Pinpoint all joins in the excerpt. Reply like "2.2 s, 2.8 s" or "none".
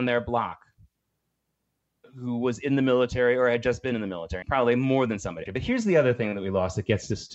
4.4 s, 5.5 s